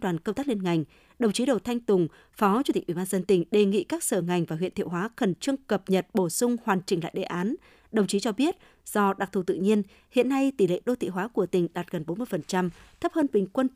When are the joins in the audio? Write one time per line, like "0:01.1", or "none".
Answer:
none